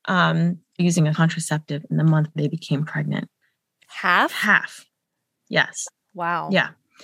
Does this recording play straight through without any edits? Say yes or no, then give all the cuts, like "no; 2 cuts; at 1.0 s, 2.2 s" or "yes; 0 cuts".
yes; 0 cuts